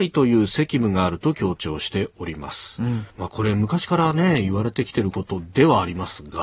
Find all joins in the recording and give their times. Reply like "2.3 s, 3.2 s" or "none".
3.1 s